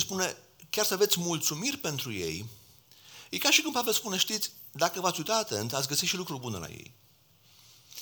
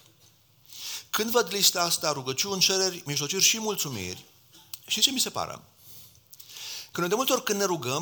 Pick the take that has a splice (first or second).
second